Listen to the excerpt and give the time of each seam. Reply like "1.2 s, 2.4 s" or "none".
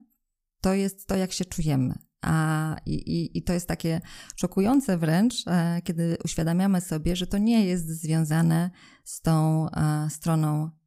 none

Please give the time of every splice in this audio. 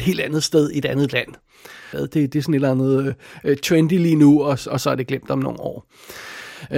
1.9 s

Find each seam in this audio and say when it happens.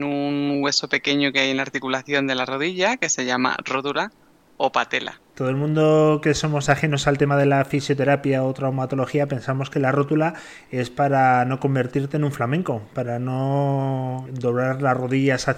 5.3 s, 14.3 s

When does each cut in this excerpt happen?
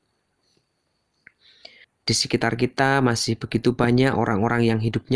1.8 s

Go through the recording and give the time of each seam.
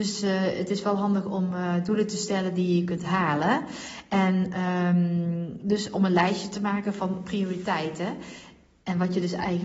none

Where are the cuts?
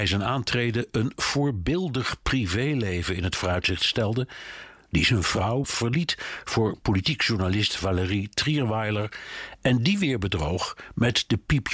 5.6 s

